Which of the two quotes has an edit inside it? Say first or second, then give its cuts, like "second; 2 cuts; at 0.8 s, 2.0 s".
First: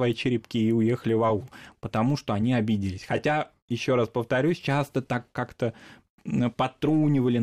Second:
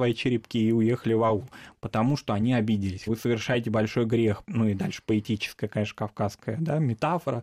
second; 2 cuts; at 3.1 s, 4.4 s